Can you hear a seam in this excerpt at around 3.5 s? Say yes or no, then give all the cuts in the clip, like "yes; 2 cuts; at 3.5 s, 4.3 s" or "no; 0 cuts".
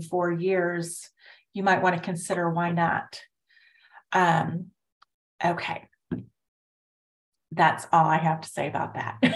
no; 0 cuts